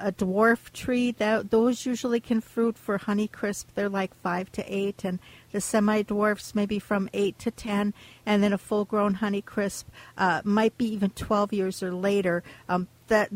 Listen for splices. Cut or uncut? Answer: uncut